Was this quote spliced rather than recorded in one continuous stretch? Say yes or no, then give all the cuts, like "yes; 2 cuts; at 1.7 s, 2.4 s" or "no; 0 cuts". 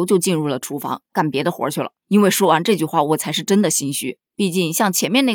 no; 0 cuts